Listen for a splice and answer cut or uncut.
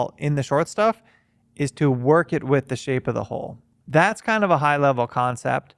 cut